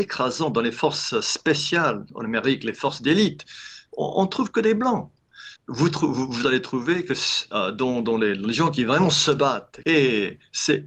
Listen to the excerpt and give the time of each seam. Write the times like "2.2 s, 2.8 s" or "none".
5.6 s, 9.8 s